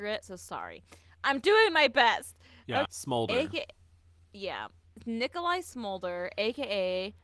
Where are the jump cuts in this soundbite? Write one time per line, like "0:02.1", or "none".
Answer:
0:02.9